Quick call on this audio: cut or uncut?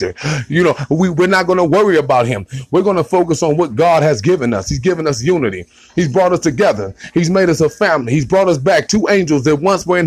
uncut